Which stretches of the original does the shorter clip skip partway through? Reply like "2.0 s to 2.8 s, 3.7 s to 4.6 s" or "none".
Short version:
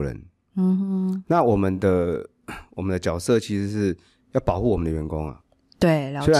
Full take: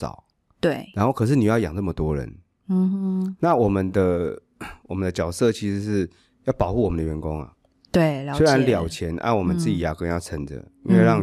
none